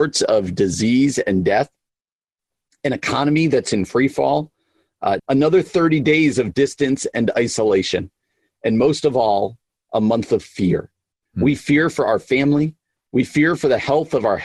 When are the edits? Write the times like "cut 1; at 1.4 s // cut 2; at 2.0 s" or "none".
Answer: cut 1; at 5.2 s